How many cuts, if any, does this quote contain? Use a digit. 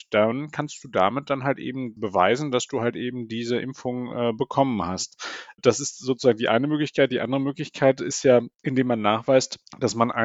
0